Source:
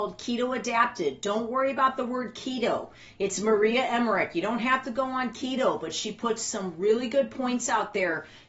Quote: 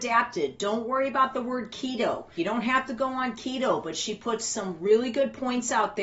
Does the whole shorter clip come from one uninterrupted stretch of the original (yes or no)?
no